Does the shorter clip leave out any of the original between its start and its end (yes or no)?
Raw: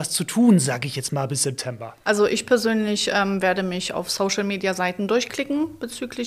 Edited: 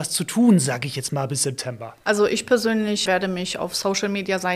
yes